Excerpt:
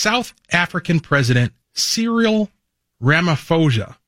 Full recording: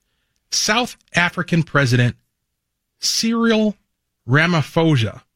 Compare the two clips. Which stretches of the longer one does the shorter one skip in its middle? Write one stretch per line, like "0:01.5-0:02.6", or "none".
0:02.2-0:02.9